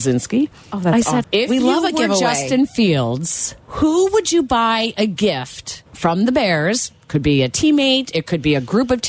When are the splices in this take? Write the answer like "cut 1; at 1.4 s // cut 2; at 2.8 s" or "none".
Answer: cut 1; at 1.2 s // cut 2; at 3.6 s // cut 3; at 5.9 s